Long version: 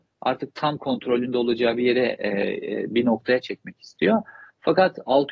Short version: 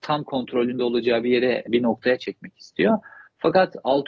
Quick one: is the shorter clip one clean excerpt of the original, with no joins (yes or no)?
no